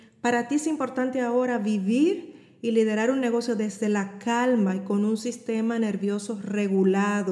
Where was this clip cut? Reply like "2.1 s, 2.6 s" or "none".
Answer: none